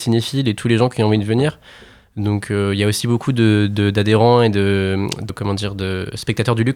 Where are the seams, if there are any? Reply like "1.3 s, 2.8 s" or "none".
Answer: 5.3 s